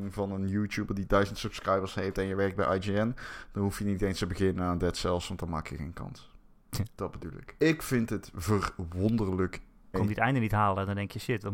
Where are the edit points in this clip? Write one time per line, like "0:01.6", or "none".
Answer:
0:07.6
0:09.9